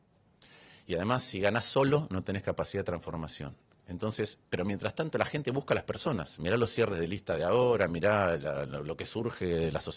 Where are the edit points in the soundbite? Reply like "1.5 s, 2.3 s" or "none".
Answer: none